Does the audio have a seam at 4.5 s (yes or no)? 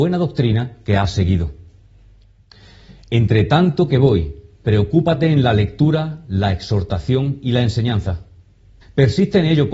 no